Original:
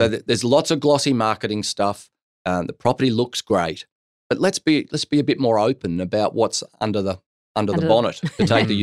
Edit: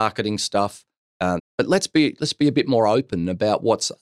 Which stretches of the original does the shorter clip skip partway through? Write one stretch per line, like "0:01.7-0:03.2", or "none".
0:02.6-0:04.1